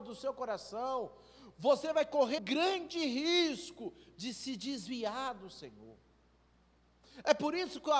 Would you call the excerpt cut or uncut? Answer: cut